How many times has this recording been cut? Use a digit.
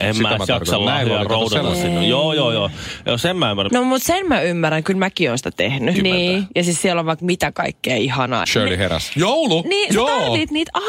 3